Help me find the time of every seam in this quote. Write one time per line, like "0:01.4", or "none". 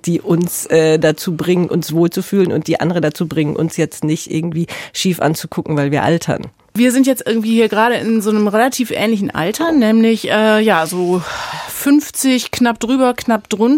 none